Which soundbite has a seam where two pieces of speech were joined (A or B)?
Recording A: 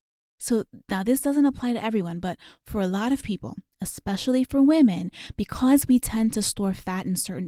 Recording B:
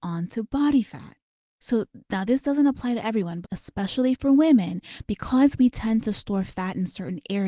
B